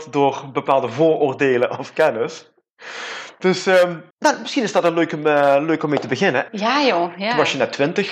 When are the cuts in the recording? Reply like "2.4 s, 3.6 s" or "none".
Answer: 4.1 s, 6.5 s